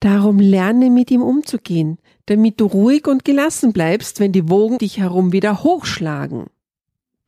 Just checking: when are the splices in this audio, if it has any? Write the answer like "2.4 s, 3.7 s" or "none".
4.8 s